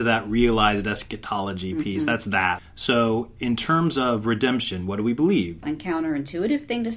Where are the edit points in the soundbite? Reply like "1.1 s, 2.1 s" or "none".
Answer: 2.6 s, 5.6 s